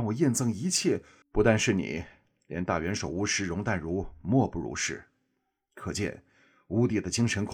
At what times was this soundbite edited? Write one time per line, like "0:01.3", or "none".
0:01.2